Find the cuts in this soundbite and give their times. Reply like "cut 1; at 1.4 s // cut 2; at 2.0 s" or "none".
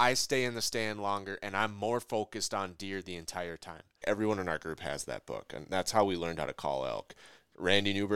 cut 1; at 4.0 s